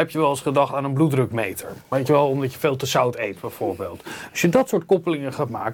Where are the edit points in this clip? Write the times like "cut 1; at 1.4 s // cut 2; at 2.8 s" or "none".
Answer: none